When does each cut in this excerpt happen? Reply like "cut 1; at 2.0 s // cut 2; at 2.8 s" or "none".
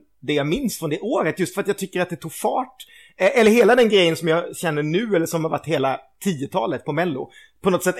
none